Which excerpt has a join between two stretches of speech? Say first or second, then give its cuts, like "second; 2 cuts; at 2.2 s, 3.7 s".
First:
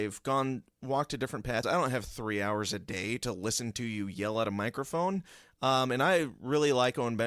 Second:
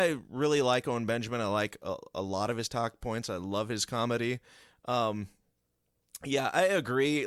first; 1 cut; at 1.6 s